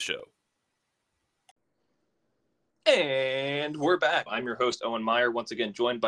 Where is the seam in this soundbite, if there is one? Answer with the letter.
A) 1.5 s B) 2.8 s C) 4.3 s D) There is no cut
C